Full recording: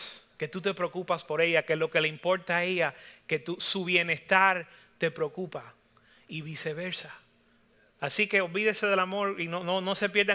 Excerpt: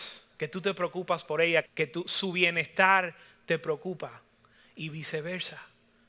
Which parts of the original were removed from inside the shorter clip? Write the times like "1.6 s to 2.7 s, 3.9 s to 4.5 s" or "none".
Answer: 1.7 s to 3.2 s